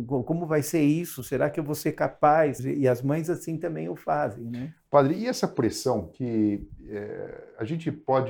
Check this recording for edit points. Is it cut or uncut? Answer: cut